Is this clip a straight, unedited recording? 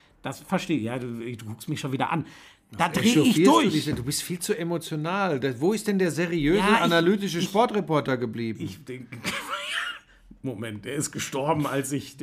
yes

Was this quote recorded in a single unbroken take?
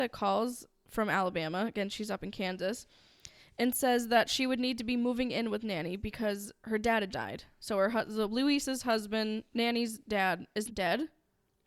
no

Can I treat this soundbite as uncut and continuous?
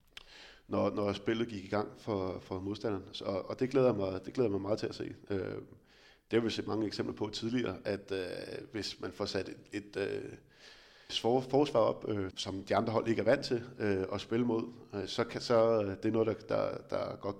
no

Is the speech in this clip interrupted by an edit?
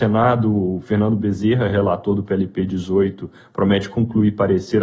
no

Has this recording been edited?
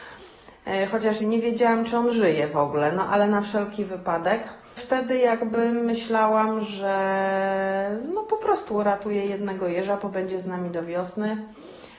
yes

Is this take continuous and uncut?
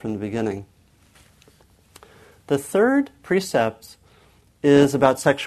yes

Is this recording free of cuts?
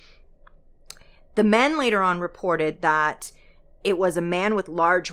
yes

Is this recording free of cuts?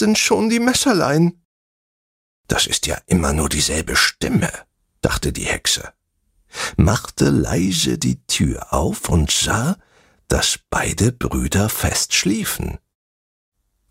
yes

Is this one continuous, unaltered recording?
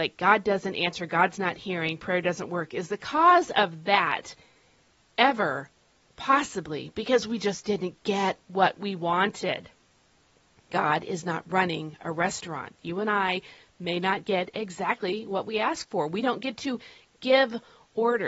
yes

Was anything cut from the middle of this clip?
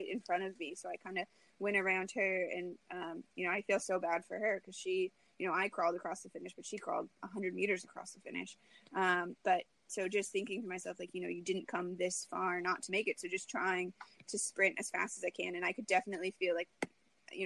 no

